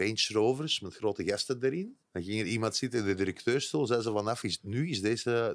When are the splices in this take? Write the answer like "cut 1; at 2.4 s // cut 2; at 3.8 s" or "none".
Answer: cut 1; at 2.1 s